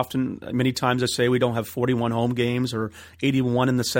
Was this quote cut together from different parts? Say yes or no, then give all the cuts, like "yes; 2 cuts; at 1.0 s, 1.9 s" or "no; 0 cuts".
no; 0 cuts